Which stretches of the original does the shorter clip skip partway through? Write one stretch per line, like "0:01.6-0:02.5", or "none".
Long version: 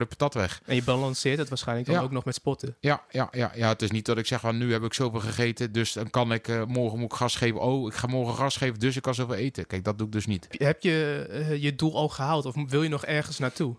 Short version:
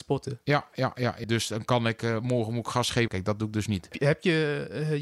0:03.6-0:05.7
0:07.5-0:09.7